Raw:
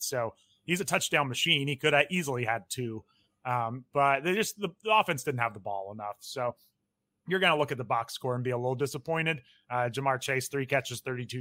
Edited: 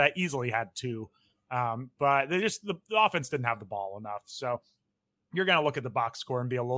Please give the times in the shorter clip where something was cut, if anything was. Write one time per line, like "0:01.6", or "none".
none